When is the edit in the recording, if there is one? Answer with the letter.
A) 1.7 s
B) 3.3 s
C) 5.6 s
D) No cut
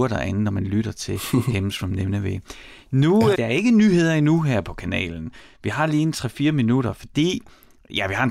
B